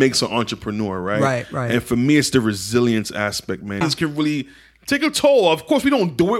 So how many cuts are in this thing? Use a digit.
1